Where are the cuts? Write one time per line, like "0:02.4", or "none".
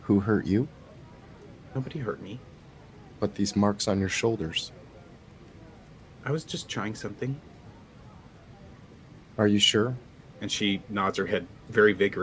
none